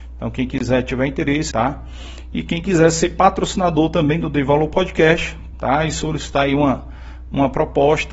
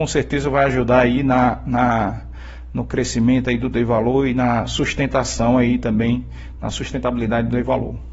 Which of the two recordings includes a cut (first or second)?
first